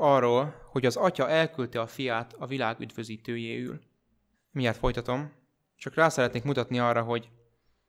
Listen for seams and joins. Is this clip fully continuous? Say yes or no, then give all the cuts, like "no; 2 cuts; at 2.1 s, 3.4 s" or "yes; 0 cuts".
no; 1 cut; at 4.3 s